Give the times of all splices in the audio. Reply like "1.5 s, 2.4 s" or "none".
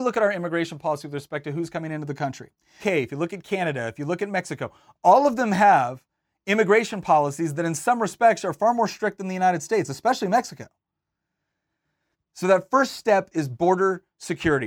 2.8 s, 12.1 s